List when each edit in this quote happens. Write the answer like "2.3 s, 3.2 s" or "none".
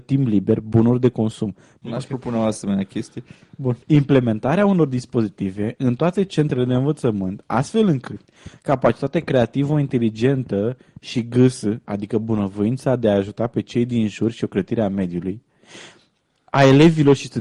1.8 s, 3.8 s, 11.9 s